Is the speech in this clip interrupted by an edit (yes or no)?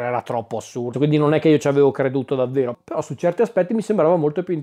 yes